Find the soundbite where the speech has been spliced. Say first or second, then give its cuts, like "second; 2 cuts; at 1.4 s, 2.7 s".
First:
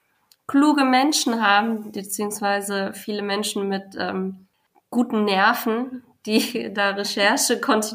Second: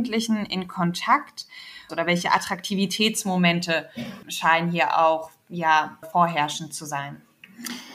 second; 3 cuts; at 1.9 s, 4.2 s, 6.0 s